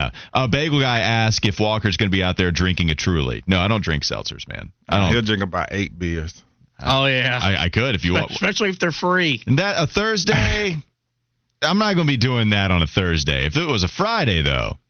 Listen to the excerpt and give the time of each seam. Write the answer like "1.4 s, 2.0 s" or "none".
none